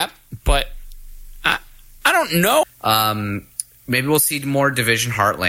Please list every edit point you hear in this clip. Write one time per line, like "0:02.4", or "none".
0:02.6